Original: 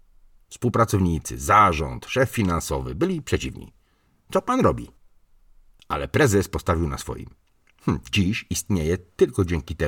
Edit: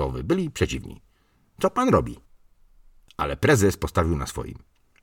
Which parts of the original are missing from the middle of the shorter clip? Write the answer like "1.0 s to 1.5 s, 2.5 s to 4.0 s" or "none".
none